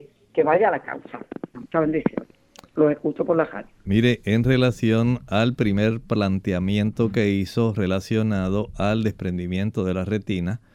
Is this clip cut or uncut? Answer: cut